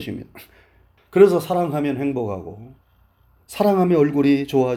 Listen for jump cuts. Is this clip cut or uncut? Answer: cut